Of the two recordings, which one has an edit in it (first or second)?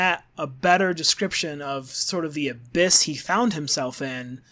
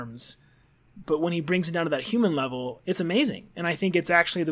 second